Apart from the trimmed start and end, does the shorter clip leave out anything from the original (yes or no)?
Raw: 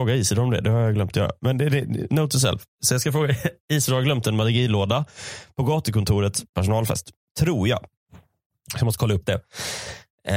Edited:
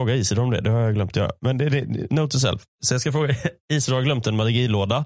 no